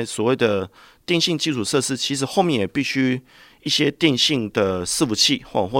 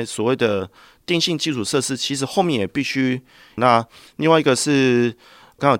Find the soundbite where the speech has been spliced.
second; 1 cut; at 3.6 s

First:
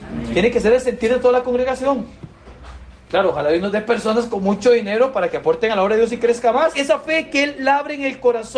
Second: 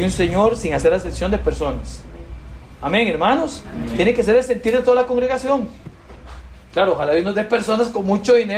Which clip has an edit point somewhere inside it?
first; 1 cut; at 6.7 s

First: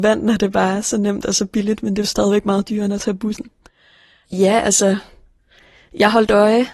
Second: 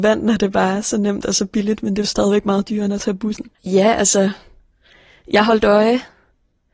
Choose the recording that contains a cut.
second; 1 cut; at 3.5 s

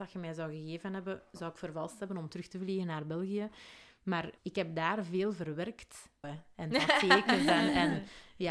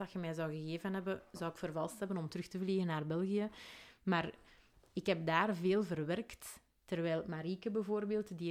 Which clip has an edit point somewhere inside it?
first; 2 cuts; at 4.4 s, 6.2 s

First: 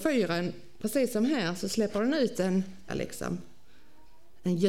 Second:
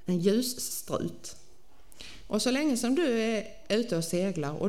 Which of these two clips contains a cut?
first; 1 cut; at 2.9 s

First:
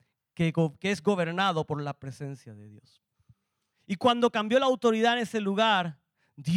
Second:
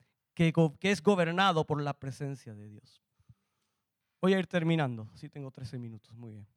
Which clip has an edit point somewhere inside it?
first; 1 cut; at 3.7 s

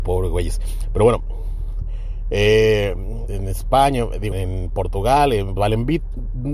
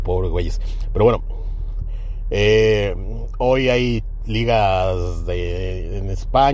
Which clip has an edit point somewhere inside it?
first; 3 cuts; at 3.3 s, 4.3 s, 5.6 s

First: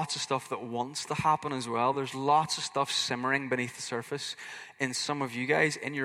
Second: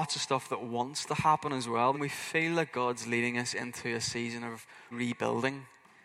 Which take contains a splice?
second; 2 cuts; at 1.9 s, 4.9 s

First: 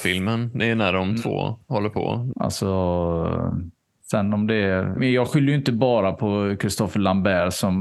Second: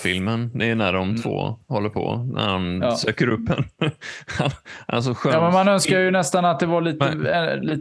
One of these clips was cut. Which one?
first; 2 cuts; at 2.3 s, 5.0 s

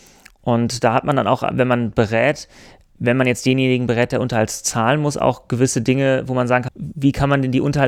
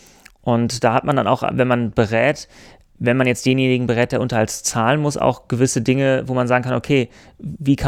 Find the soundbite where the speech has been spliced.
first; 1 cut; at 6.7 s

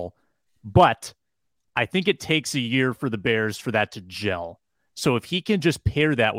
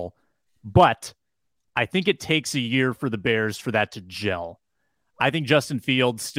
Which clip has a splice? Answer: first; 1 cut; at 4.9 s

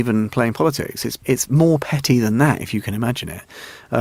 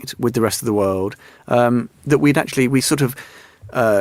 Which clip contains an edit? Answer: first; 1 cut; at 1.2 s

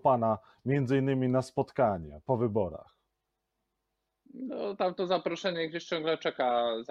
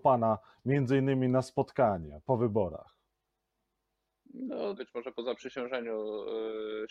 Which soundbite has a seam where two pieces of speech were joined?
second; 1 cut; at 4.8 s

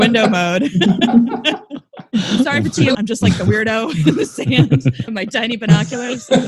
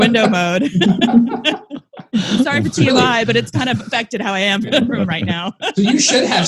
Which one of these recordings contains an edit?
first; 2 cuts; at 2.9 s, 5.1 s

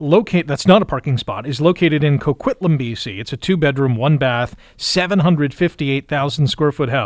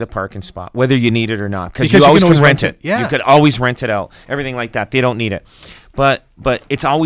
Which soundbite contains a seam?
second; 1 cut; at 4.2 s

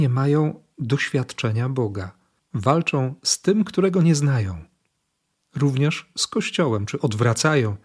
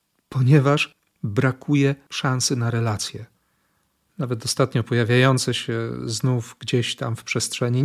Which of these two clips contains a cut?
first; 1 cut; at 2.4 s

